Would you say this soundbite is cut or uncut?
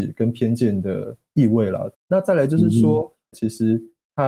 cut